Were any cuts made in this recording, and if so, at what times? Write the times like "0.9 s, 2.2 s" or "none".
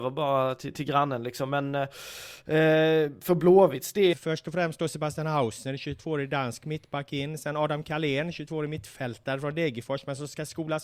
4.1 s